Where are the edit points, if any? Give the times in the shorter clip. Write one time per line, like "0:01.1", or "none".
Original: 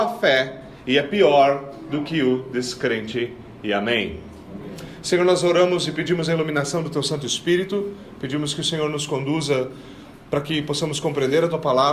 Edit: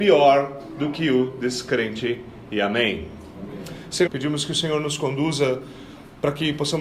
0:04.1